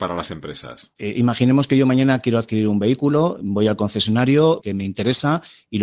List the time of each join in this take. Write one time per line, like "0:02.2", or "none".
0:01.0
0:04.6